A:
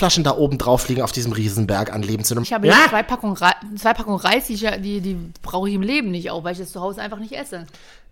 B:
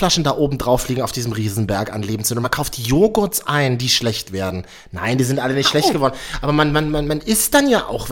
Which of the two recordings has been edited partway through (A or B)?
A